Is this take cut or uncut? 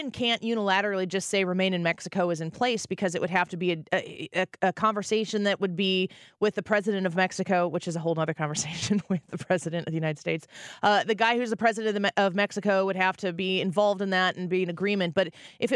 uncut